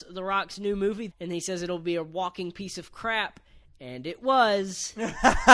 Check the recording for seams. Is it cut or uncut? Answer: cut